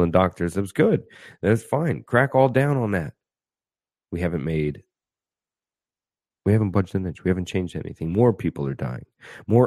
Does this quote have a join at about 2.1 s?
no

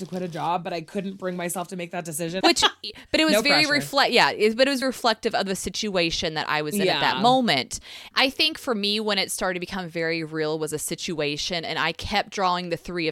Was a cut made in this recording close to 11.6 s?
no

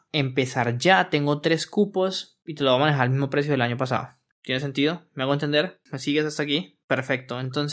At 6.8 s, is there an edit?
no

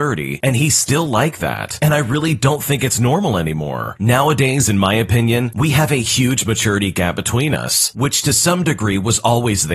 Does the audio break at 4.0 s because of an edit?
yes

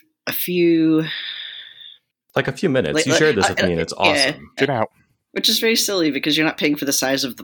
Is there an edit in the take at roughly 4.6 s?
yes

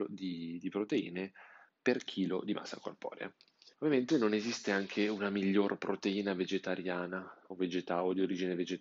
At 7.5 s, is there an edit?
no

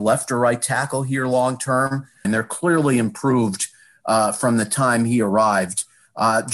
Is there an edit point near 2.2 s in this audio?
yes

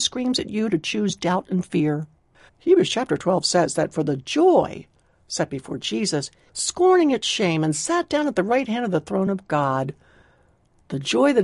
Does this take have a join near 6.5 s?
yes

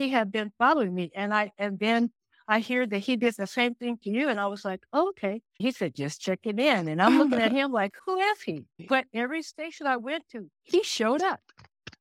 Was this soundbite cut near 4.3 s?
no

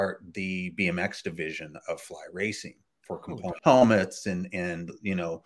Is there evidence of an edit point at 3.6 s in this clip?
yes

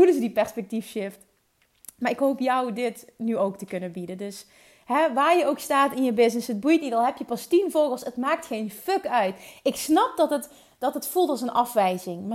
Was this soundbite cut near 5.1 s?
no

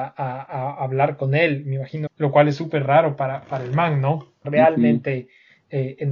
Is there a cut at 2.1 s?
yes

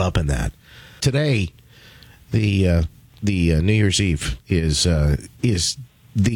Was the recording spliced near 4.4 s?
no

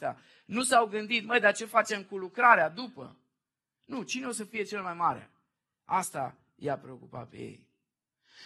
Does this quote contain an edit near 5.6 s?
no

